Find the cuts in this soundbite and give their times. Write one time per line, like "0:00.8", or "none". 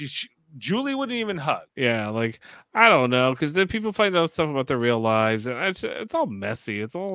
0:01.7